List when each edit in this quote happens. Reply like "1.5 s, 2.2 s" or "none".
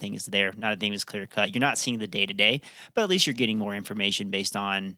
none